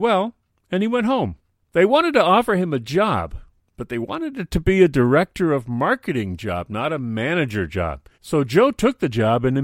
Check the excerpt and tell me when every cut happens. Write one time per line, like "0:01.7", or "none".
0:01.6
0:08.1